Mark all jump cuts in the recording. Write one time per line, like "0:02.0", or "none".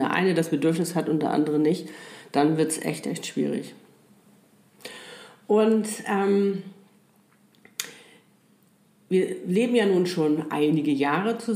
none